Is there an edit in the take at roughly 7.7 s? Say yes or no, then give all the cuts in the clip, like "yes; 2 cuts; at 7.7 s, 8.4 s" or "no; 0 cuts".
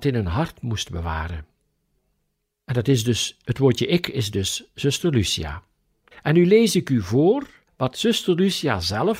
yes; 3 cuts; at 2.5 s, 6.1 s, 7.7 s